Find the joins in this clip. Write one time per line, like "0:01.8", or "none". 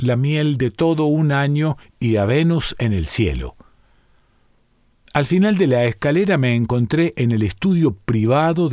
none